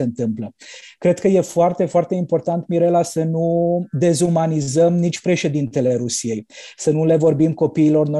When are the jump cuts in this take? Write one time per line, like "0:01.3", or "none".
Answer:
none